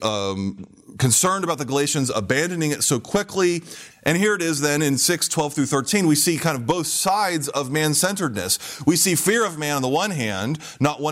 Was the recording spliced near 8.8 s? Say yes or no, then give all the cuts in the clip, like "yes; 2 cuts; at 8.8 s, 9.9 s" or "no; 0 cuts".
no; 1 cut; at 3.9 s